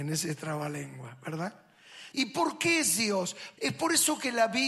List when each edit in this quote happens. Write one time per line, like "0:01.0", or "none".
0:02.1
0:03.6